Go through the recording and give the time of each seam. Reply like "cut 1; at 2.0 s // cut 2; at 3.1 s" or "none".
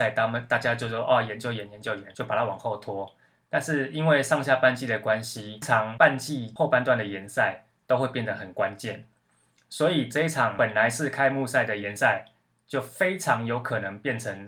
cut 1; at 5.6 s